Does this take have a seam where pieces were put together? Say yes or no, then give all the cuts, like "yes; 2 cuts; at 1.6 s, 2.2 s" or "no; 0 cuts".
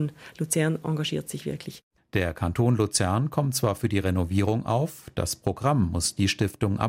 yes; 1 cut; at 2.0 s